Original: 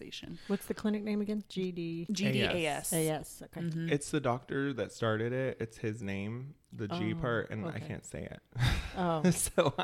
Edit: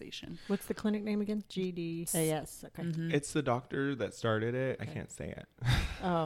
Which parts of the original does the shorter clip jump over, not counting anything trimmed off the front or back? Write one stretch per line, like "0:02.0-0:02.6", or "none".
0:02.1-0:02.8
0:05.6-0:07.7